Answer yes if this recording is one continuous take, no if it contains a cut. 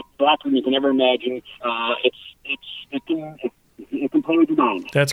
no